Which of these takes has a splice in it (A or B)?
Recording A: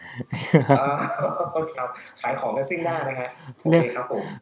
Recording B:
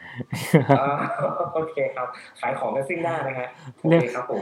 A